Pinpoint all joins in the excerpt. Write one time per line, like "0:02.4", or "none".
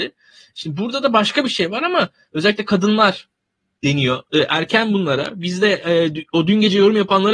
0:04.3